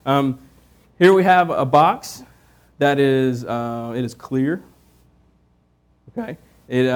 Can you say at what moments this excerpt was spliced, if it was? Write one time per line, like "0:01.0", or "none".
none